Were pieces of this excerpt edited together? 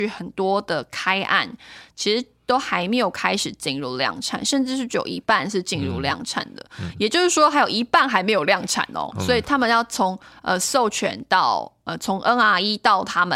no; 0 cuts

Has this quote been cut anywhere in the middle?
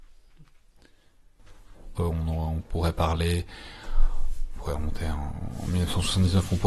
yes; 1 cut; at 2.0 s

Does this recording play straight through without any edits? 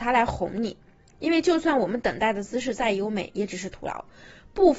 yes; 0 cuts

